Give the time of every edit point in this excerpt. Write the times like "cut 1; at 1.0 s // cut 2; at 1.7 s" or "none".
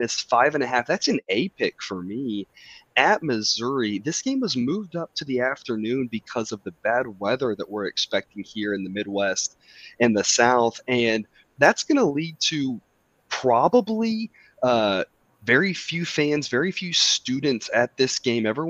none